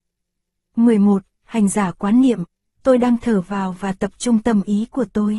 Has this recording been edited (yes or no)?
no